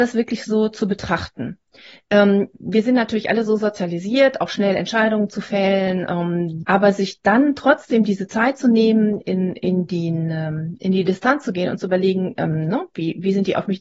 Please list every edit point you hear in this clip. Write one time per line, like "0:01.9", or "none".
0:06.6